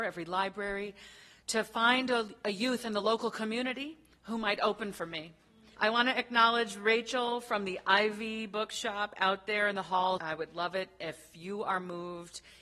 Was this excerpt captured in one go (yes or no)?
no